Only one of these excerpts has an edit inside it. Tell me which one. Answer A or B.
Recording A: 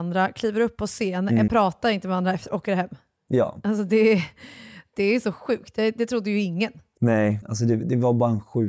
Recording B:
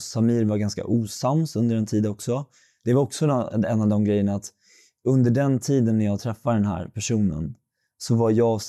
A